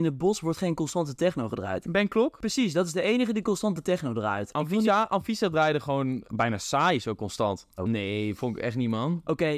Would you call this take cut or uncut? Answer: cut